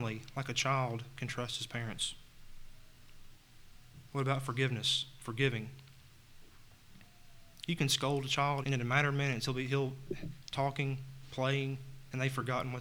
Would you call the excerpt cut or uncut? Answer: cut